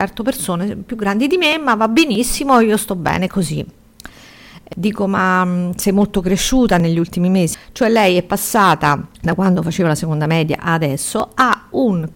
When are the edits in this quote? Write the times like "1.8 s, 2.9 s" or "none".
7.5 s, 9.1 s